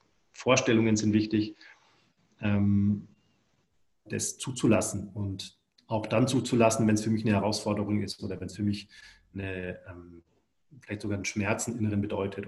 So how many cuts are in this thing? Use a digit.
1